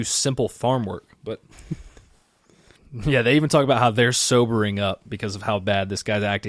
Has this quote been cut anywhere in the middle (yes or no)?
yes